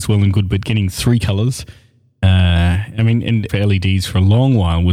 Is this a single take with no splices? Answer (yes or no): no